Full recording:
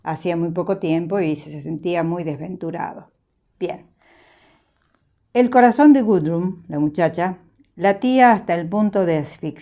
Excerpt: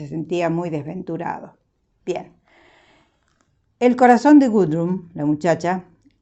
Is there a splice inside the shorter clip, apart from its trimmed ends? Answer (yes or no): no